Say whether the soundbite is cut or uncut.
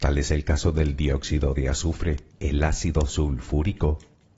cut